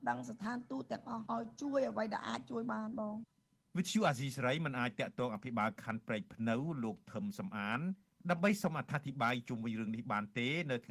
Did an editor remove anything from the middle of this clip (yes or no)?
no